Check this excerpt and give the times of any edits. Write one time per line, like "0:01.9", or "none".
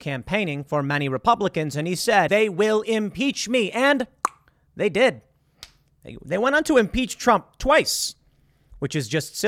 0:02.3